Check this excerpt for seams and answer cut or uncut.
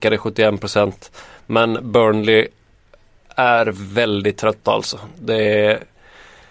uncut